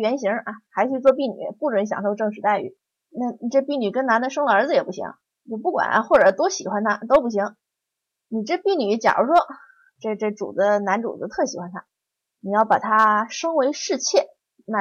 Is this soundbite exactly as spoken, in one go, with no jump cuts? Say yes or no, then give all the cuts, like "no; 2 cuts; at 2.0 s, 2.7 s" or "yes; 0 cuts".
yes; 0 cuts